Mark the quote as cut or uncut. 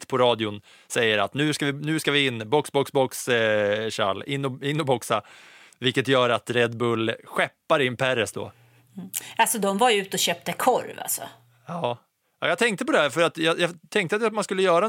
uncut